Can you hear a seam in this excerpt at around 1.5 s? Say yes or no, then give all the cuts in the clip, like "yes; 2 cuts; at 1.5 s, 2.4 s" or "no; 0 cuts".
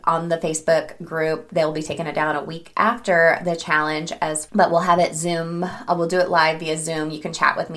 no; 1 cut; at 4.5 s